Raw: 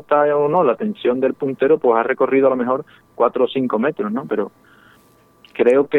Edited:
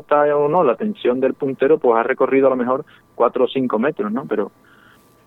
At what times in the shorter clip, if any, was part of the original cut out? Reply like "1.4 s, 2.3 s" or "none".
none

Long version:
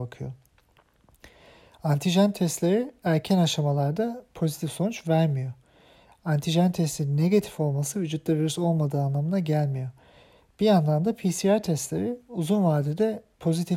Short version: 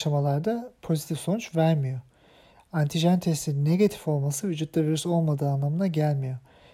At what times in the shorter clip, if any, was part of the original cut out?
none

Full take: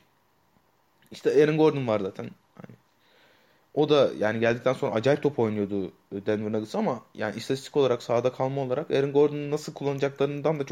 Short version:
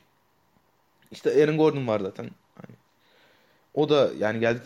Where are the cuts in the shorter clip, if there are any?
none

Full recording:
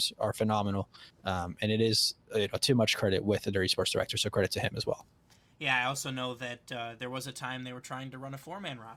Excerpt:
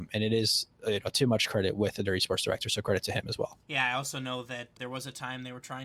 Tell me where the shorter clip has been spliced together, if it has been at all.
3.6 s, 4.8 s

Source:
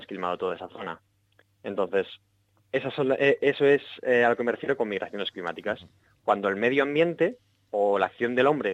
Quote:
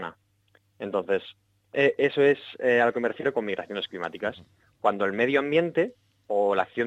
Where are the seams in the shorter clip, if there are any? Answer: 1.7 s

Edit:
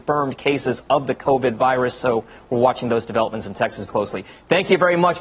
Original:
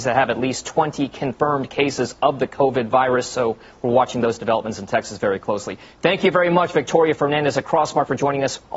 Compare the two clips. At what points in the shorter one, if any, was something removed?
3.9 s

